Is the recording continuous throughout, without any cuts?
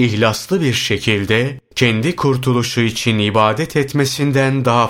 yes; 0 cuts

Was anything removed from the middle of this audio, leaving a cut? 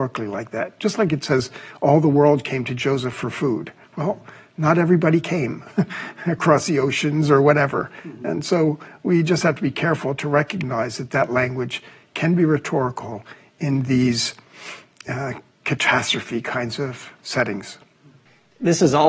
no; 0 cuts

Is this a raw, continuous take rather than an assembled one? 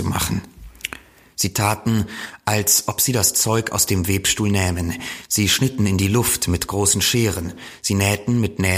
yes; 0 cuts

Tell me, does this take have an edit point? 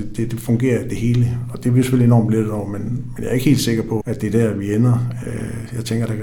yes; 1 cut; at 4.0 s

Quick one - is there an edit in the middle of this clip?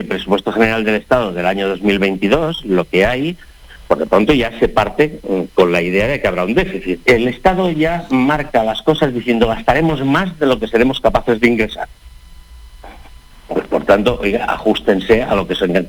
yes; 1 cut; at 7.0 s

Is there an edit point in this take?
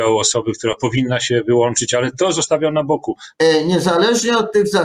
yes; 1 cut; at 3.3 s

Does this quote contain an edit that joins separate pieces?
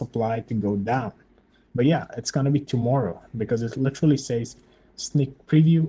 yes; 1 cut; at 1.7 s

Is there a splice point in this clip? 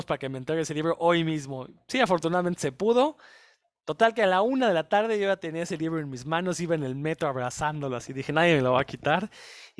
no; 0 cuts

